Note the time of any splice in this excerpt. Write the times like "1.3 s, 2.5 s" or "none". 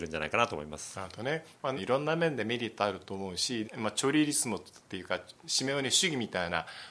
1.8 s, 3.6 s